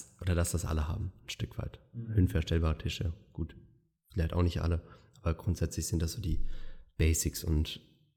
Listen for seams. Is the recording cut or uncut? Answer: uncut